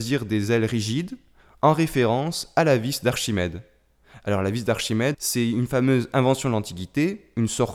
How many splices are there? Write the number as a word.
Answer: one